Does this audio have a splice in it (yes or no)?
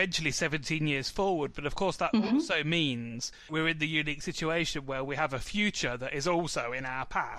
no